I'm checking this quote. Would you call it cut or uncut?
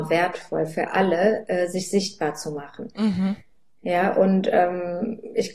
uncut